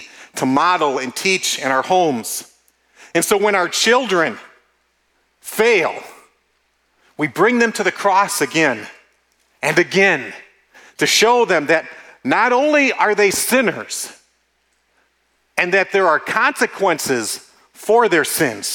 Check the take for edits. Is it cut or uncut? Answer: uncut